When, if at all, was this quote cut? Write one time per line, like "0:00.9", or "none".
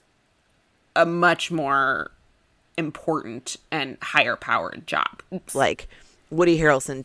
0:05.5